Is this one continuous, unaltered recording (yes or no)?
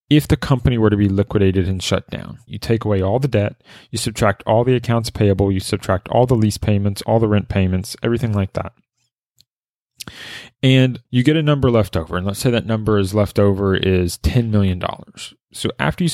no